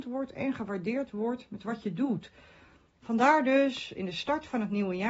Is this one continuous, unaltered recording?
no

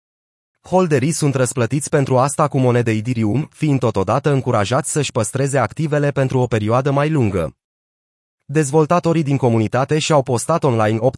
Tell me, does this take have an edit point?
no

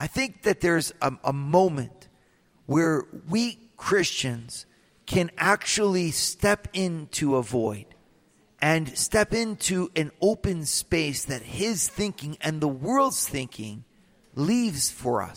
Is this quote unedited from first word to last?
yes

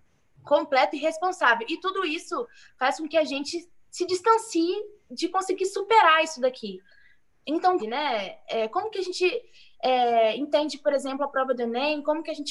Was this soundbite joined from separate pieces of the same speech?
yes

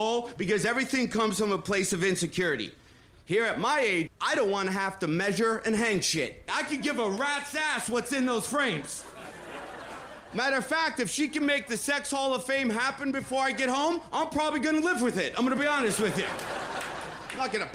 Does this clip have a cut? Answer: yes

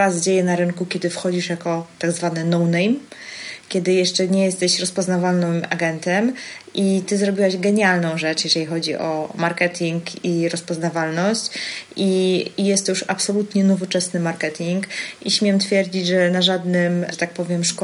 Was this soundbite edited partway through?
no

